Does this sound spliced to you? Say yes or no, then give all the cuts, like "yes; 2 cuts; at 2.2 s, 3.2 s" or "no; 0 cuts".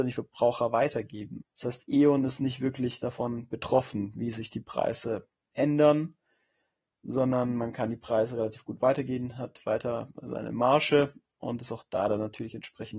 yes; 1 cut; at 1.4 s